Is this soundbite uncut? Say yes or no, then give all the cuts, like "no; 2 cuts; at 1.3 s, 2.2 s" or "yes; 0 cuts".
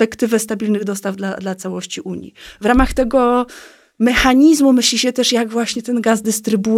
yes; 0 cuts